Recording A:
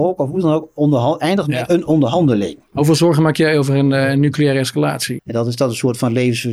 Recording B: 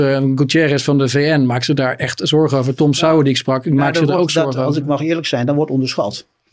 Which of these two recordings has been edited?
A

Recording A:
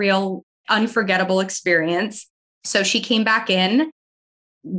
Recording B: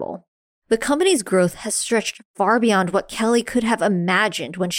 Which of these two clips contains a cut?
A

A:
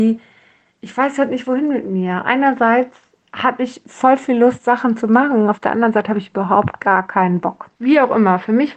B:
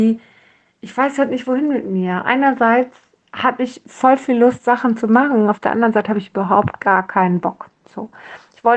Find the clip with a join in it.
A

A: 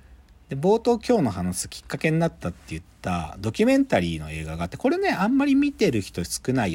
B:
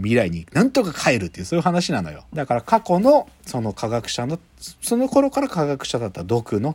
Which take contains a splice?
B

